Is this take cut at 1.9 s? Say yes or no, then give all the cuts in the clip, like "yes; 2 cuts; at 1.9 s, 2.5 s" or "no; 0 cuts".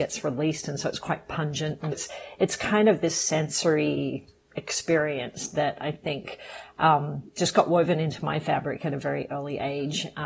yes; 1 cut; at 1.9 s